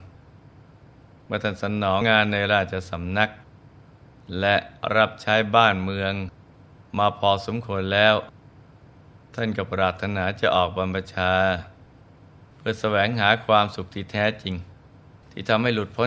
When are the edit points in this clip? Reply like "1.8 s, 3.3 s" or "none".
2.0 s